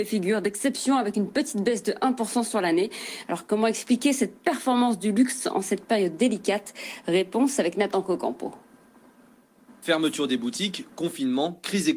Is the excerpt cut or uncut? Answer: uncut